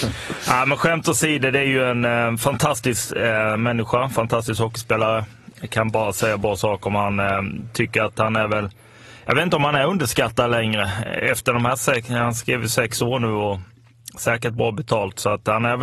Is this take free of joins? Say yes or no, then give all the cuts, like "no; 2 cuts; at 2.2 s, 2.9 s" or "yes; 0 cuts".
yes; 0 cuts